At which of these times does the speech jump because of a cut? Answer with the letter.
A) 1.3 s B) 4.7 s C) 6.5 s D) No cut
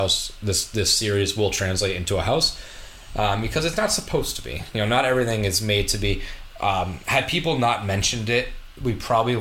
D